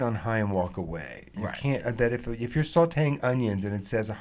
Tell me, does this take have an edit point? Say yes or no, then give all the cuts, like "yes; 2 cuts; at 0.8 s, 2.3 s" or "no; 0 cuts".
no; 0 cuts